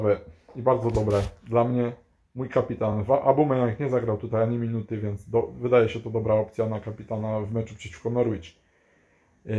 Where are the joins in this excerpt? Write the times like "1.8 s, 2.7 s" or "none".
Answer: none

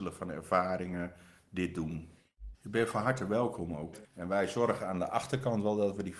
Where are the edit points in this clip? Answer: 2.5 s, 4.0 s

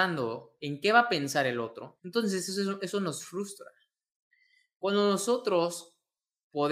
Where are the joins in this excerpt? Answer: 2.0 s

